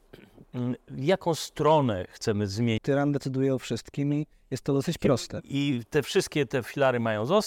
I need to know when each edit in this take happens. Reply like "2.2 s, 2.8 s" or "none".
2.8 s, 5.4 s

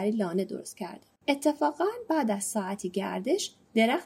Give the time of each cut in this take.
1.2 s

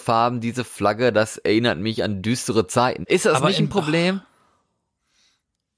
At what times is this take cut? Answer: 3.0 s

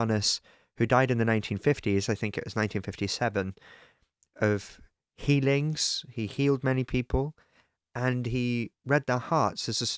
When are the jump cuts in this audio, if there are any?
none

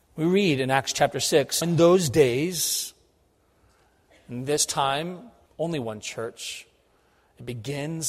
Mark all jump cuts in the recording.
1.6 s, 5.5 s

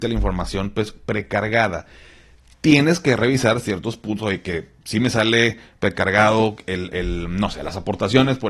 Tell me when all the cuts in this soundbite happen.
none

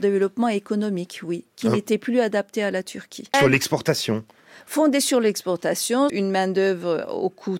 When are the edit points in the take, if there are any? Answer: 3.3 s, 6.1 s

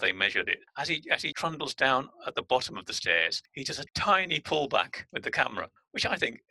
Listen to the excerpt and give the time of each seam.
1.3 s, 3.9 s

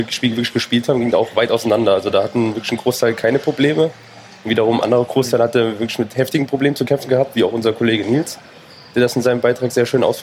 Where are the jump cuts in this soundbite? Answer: none

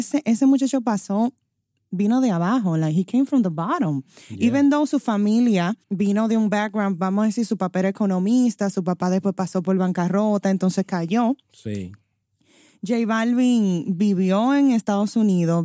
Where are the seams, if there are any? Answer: 5.8 s

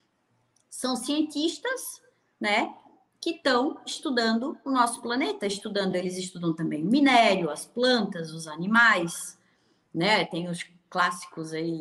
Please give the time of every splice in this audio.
none

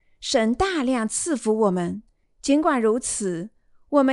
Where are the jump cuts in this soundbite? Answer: 2.2 s

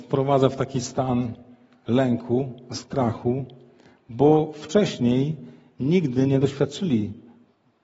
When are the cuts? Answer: none

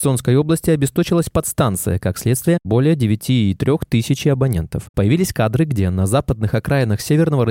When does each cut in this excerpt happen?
2.6 s, 4.9 s

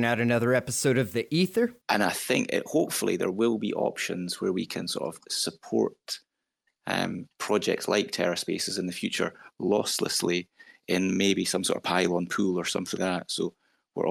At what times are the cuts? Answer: 1.8 s, 13.0 s

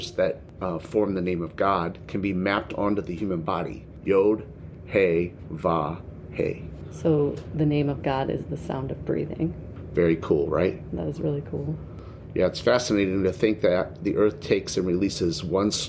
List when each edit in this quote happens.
4.0 s, 12.3 s

